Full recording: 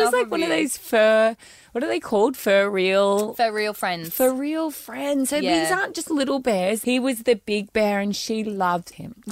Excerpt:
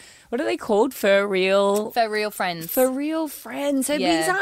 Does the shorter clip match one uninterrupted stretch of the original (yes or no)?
yes